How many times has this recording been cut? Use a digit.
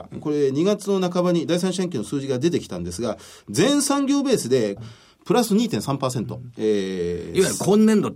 1